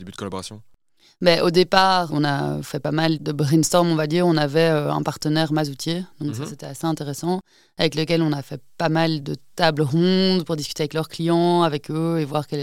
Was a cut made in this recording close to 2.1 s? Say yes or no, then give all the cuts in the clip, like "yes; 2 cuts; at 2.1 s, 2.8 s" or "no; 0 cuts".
yes; 1 cut; at 2.1 s